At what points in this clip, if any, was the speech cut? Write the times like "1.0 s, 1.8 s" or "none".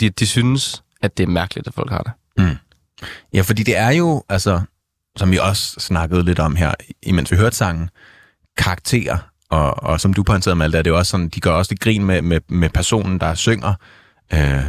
none